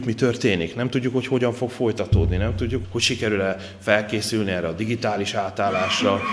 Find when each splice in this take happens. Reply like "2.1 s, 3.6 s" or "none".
2.8 s